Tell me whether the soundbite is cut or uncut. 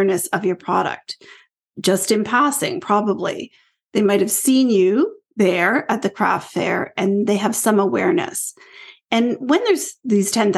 uncut